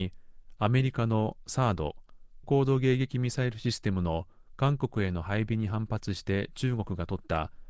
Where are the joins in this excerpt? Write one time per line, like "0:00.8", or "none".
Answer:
0:02.4

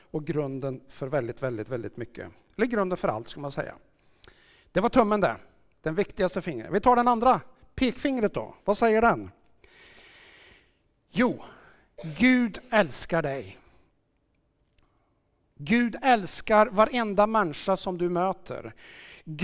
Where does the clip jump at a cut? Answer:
none

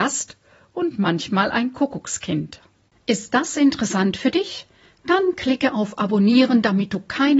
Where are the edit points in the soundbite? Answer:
none

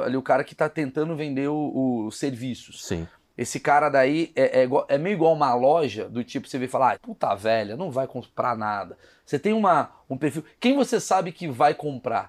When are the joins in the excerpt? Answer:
0:06.9

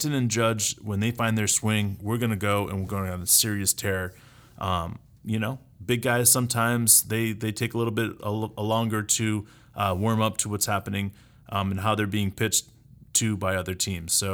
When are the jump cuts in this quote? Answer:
none

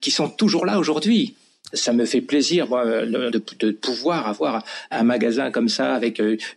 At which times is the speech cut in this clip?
0:01.7
0:03.3

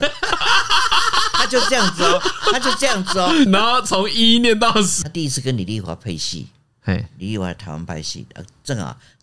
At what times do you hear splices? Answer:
0:03.5
0:05.0

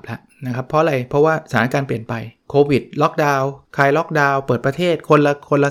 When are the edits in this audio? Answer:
0:02.4
0:03.7

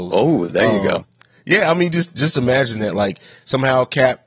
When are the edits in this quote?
none

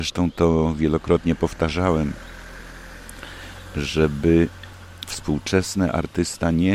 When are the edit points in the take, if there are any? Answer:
none

